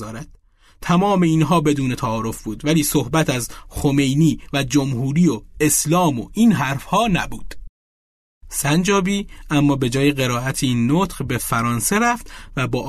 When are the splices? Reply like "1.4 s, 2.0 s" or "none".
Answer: none